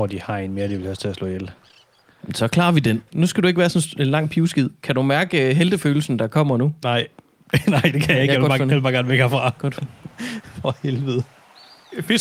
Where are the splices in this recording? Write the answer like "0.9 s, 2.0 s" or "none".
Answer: none